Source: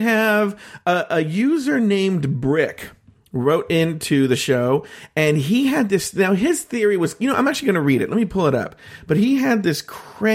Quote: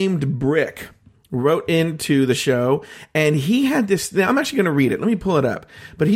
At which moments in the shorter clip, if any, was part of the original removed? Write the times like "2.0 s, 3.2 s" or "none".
4.3 s